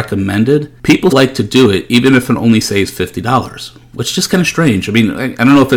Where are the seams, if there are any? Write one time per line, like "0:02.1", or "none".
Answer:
0:01.1